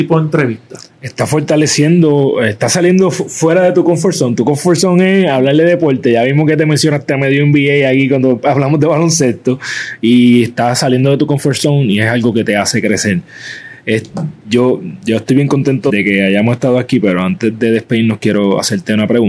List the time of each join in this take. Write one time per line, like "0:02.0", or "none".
0:15.9